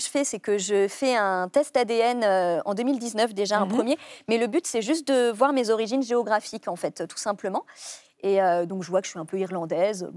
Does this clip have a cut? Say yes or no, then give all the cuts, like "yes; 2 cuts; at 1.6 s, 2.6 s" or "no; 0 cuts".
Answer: no; 0 cuts